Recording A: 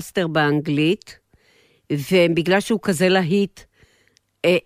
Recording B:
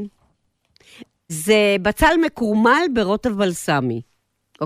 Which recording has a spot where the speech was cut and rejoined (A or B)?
B